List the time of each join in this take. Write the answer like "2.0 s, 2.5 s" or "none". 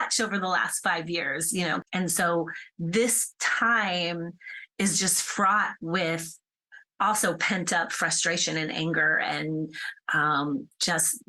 none